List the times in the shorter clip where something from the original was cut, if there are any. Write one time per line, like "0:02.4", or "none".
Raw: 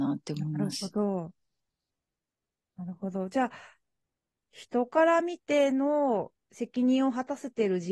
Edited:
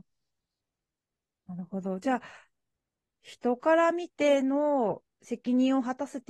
none